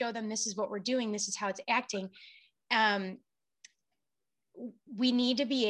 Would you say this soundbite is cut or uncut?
uncut